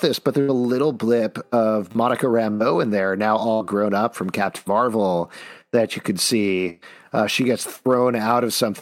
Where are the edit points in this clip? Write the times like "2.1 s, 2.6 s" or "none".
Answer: none